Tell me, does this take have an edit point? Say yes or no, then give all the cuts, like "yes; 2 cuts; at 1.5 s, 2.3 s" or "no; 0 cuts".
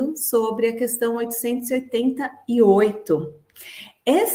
no; 0 cuts